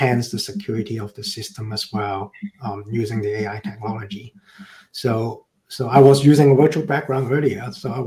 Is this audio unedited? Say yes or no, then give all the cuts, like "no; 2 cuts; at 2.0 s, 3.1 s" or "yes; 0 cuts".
yes; 0 cuts